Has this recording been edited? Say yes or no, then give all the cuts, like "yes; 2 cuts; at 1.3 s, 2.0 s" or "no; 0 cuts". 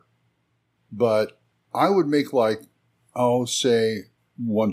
no; 0 cuts